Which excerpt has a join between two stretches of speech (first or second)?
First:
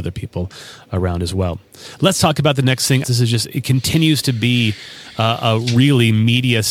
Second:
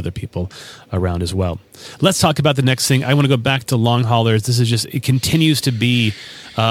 first